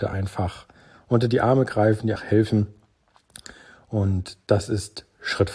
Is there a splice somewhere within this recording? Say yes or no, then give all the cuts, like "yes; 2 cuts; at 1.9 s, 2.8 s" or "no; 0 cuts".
yes; 1 cut; at 2.2 s